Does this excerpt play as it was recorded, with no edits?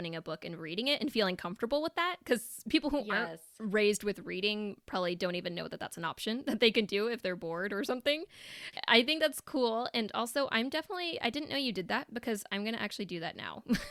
yes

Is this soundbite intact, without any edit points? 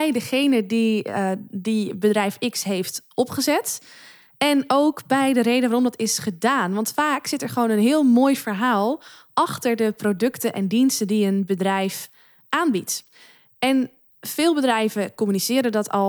yes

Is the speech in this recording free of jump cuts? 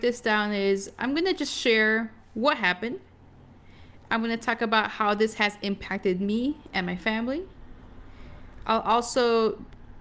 yes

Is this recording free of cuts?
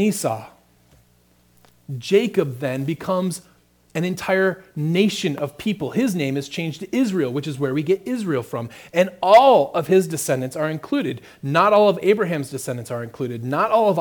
yes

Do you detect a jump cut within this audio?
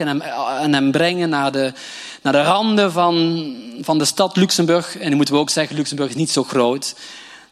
no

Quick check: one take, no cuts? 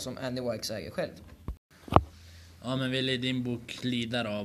no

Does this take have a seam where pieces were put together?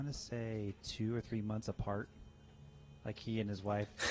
no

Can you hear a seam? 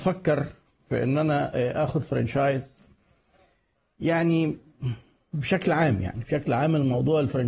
no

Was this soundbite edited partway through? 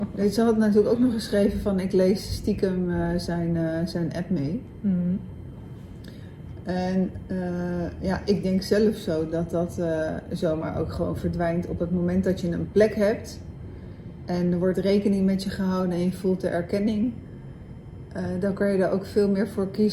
no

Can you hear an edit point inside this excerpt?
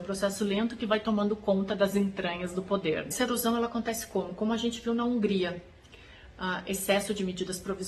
no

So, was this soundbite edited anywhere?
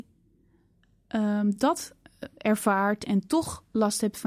no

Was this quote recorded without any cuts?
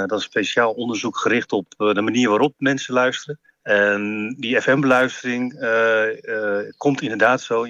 yes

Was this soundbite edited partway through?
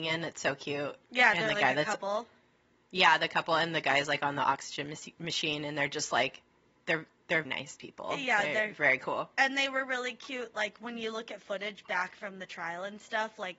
yes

